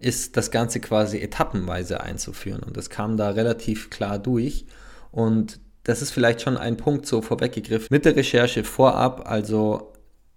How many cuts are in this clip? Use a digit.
1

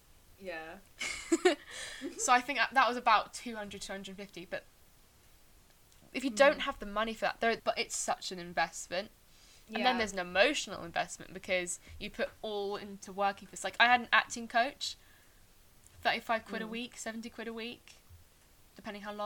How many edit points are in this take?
2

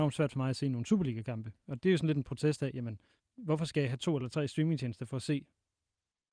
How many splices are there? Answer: 0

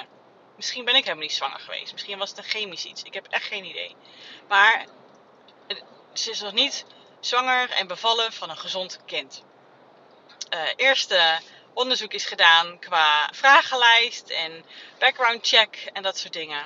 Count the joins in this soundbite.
2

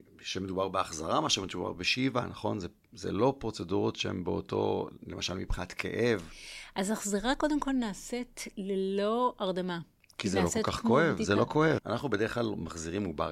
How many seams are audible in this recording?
1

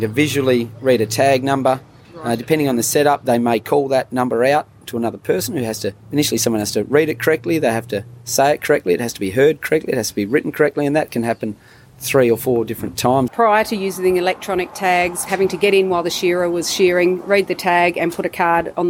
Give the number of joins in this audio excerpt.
2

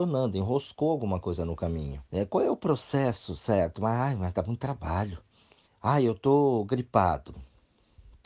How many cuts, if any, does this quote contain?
2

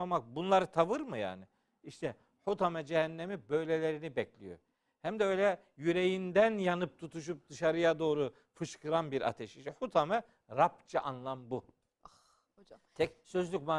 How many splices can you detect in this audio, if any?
0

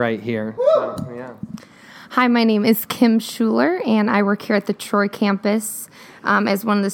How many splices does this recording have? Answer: 0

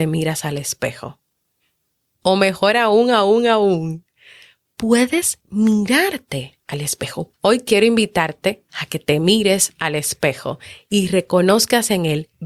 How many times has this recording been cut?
3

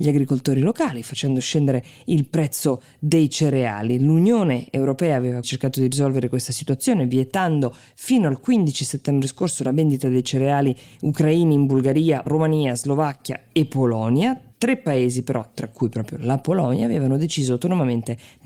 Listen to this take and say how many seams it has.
2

